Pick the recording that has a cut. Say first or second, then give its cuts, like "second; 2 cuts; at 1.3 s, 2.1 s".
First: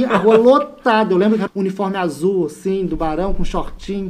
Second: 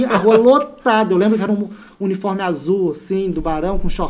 first; 1 cut; at 1.5 s